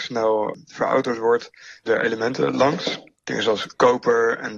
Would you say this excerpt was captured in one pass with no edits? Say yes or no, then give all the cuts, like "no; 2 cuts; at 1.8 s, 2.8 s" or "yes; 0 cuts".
no; 1 cut; at 1.9 s